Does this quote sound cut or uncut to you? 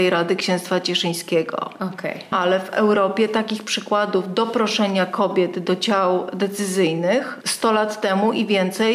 cut